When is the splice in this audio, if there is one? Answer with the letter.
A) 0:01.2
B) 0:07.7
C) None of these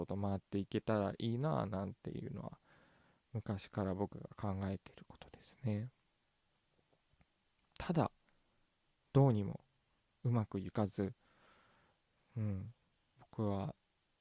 C